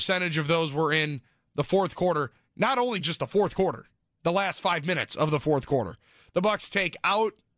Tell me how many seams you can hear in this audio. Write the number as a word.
zero